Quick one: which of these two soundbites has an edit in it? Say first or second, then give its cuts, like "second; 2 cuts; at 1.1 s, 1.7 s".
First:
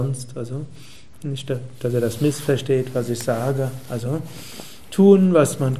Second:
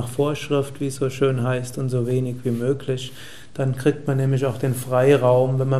second; 1 cut; at 3.5 s